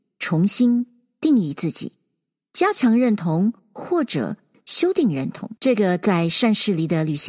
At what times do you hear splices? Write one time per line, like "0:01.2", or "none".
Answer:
0:05.6